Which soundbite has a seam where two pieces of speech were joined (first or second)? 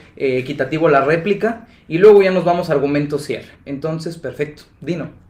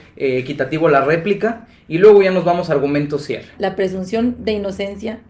second